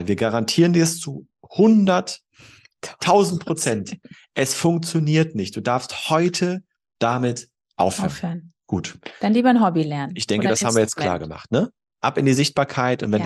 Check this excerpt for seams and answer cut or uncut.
uncut